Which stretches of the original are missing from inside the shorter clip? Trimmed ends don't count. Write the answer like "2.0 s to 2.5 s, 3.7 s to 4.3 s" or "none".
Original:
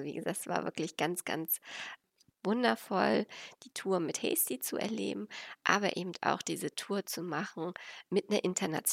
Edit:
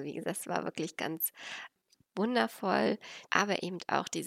1.0 s to 1.2 s, 3.5 s to 5.6 s